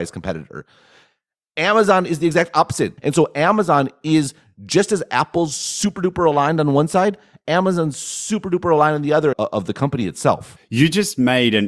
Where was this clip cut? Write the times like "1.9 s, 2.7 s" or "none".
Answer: 3.0 s, 9.3 s